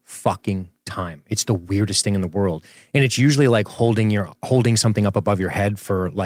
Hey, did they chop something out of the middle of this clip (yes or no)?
no